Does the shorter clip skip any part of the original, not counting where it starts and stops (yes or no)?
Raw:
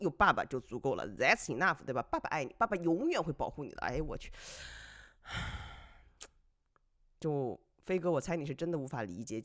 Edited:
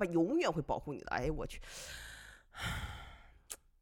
no